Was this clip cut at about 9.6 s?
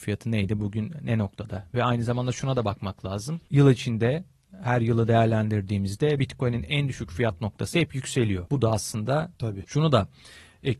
yes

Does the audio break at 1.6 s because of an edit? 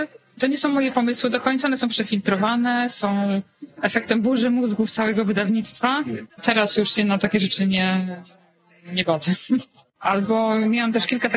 no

